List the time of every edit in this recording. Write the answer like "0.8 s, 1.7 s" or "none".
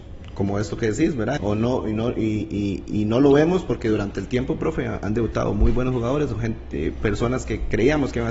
1.4 s